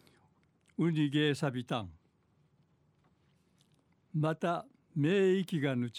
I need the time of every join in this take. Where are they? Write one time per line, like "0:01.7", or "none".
none